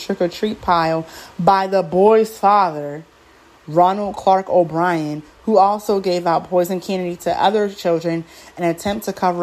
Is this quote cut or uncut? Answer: uncut